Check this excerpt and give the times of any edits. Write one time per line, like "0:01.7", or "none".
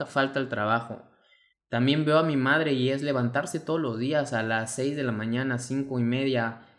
0:01.5